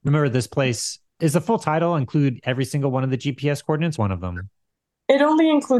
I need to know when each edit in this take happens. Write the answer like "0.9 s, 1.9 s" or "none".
1.1 s, 4.0 s